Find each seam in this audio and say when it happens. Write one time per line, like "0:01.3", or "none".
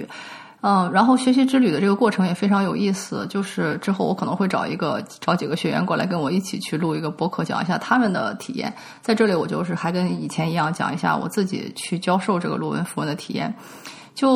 none